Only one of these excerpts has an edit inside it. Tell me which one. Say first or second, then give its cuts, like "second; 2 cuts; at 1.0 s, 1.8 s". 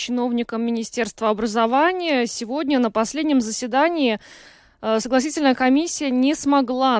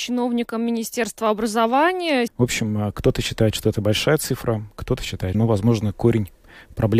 second; 2 cuts; at 2.3 s, 5.3 s